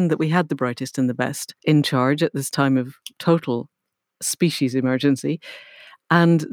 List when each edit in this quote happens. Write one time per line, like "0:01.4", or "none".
0:01.6